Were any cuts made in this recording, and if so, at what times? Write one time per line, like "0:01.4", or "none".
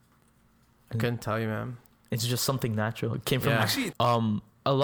0:03.9